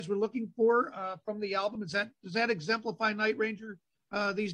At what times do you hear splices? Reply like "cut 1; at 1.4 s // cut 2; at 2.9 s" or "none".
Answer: none